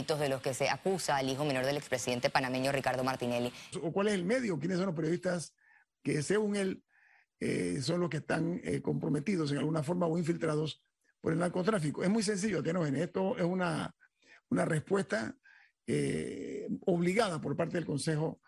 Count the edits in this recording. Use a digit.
1